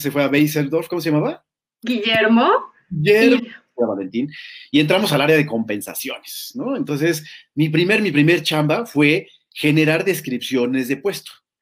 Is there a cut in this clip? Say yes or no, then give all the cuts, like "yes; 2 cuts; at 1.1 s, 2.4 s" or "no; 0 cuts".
yes; 1 cut; at 3.4 s